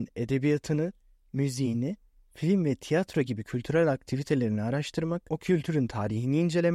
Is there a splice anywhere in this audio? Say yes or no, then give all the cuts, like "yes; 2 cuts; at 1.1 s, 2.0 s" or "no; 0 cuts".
no; 0 cuts